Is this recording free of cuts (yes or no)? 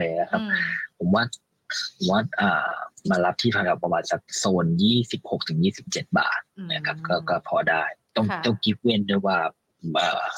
no